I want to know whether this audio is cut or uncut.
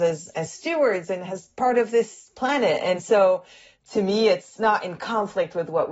uncut